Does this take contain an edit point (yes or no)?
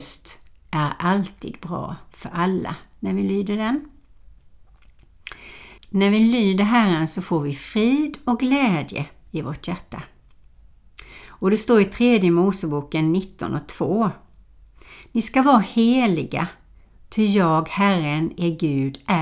yes